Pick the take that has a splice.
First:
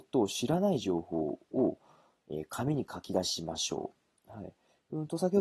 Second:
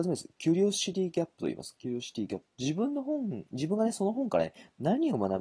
second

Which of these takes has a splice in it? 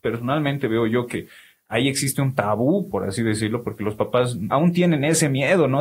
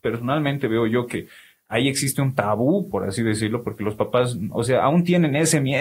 first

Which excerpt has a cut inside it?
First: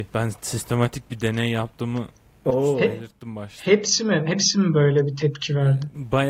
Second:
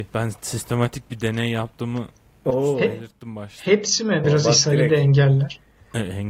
second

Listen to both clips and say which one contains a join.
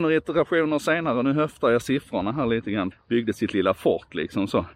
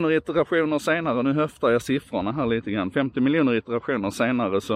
first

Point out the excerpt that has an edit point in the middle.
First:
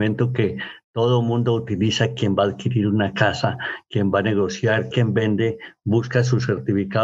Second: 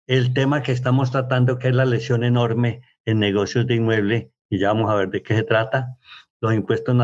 first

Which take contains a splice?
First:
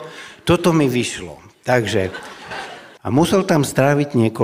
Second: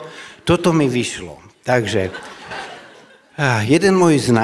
first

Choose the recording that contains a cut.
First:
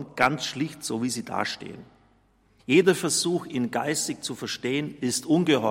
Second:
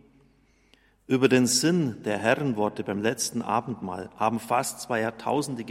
first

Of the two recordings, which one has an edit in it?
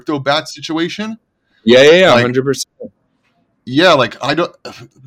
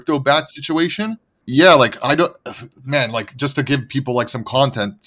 second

